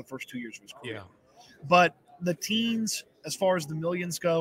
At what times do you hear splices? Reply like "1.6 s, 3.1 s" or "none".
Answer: none